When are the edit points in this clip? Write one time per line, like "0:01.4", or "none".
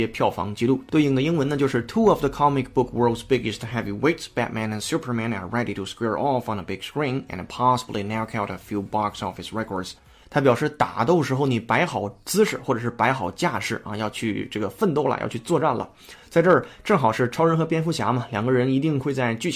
0:10.2